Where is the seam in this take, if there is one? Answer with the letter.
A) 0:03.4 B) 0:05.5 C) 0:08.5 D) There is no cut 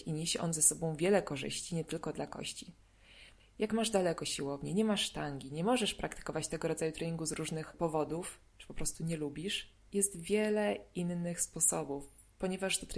A